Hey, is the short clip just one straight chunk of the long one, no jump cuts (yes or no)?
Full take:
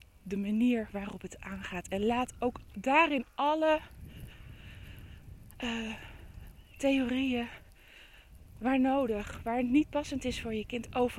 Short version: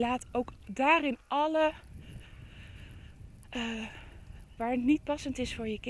no